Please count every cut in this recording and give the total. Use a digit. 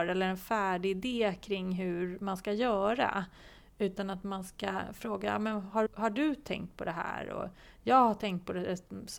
1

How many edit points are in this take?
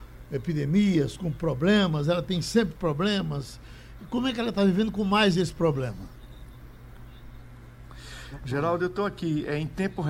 0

